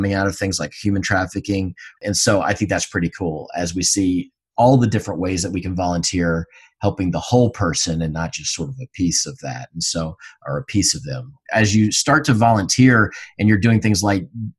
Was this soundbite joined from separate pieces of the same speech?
yes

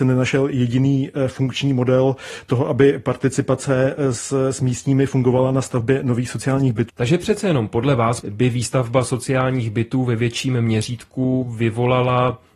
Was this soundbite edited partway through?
yes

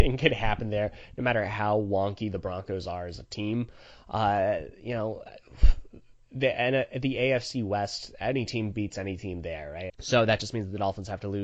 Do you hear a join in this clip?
yes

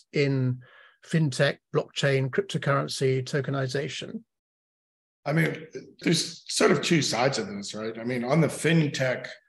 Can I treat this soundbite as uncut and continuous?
no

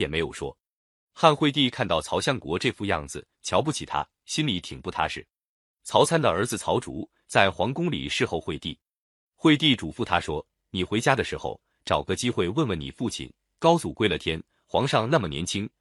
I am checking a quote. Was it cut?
yes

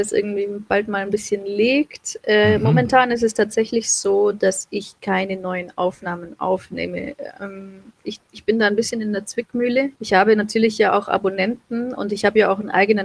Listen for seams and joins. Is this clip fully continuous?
no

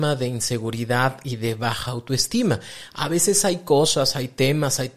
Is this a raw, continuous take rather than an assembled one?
yes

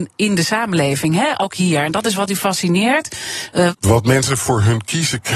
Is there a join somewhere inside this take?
yes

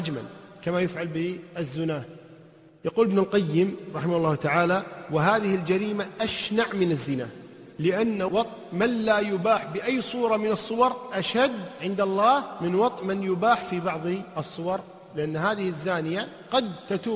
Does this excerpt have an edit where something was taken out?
no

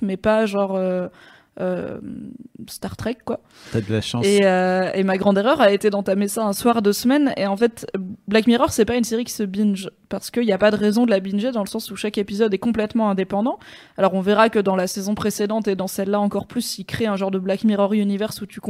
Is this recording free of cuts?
no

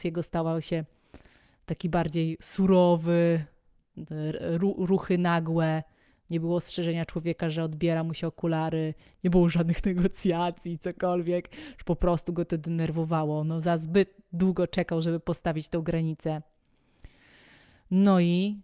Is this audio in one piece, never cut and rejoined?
yes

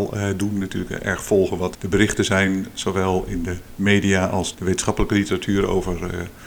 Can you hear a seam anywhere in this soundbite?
yes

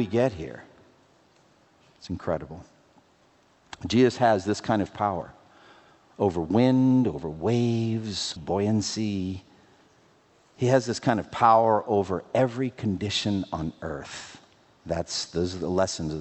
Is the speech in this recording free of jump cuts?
no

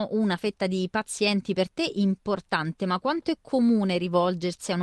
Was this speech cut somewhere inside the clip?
no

